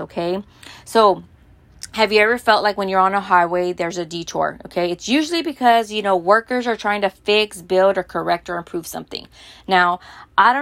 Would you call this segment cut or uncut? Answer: uncut